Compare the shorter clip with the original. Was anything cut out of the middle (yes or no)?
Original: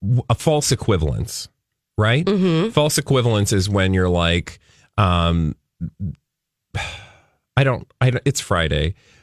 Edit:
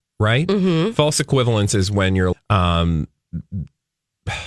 yes